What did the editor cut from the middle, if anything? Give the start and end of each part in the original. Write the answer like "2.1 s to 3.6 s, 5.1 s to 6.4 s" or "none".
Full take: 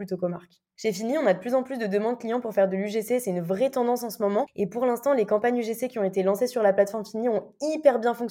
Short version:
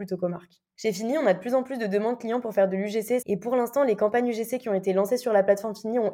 3.2 s to 4.5 s